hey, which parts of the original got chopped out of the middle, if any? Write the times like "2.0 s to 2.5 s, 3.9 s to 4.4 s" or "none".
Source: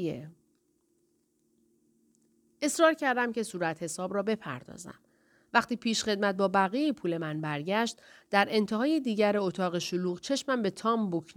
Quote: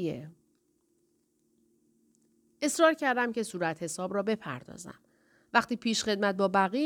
none

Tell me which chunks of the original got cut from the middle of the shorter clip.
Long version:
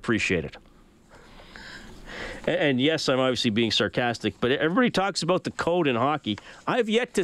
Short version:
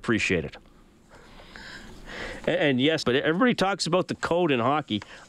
3.0 s to 4.4 s

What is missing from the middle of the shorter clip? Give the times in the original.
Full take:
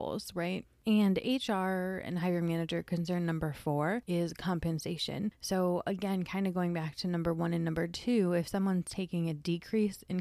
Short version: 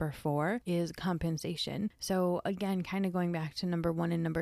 none

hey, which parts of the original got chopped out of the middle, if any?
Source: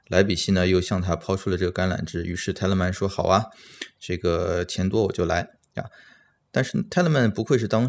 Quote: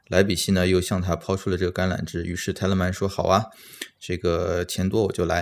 none

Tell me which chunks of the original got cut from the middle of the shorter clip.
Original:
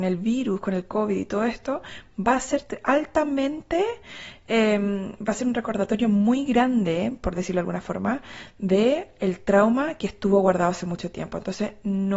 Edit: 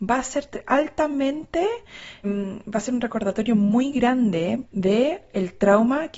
4.4 s to 4.8 s, 7.2 s to 8.5 s

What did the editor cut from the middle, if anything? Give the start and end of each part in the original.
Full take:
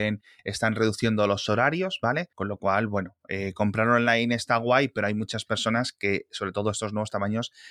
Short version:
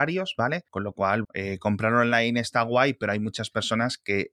2.9 s to 3.2 s

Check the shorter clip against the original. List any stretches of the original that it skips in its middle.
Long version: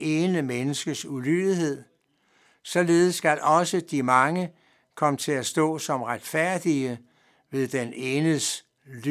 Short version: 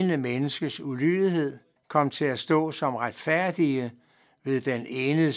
2.0 s to 4.8 s

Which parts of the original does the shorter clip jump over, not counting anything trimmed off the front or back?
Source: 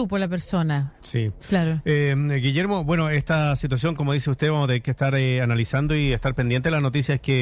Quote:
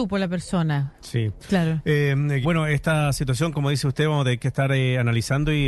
2.4 s to 2.8 s

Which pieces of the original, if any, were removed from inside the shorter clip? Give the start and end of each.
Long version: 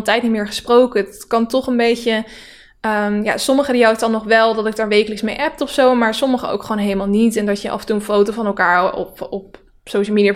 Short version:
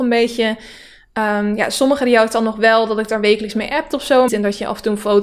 6.0 s to 7.3 s

